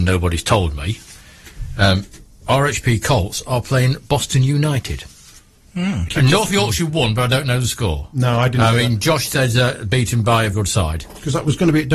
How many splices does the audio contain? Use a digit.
2